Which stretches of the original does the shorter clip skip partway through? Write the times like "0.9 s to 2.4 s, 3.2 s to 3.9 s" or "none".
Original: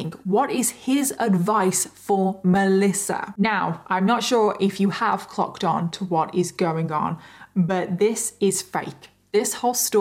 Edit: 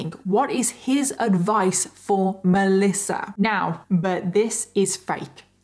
3.8 s to 7.5 s